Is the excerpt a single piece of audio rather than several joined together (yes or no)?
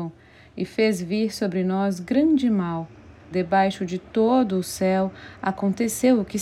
no